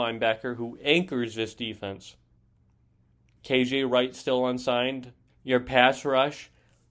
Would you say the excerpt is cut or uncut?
cut